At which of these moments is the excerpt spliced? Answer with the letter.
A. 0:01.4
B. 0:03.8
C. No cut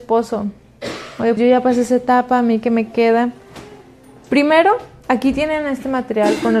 A